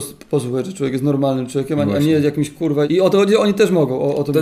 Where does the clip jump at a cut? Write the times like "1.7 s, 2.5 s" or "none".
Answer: 2.9 s